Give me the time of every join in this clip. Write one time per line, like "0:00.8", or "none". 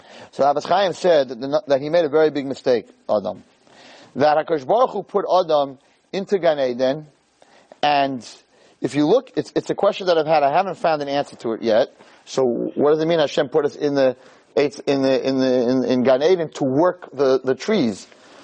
0:09.3
0:12.2